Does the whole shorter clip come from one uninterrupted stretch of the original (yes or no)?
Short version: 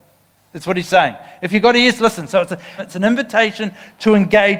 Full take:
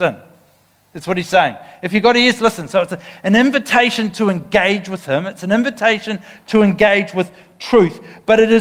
no